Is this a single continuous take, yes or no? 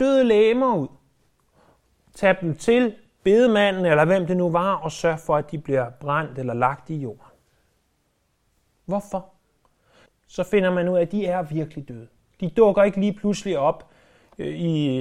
no